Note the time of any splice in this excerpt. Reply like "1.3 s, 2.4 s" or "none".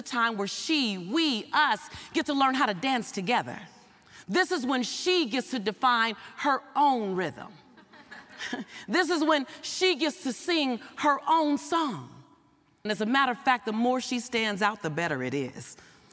12.9 s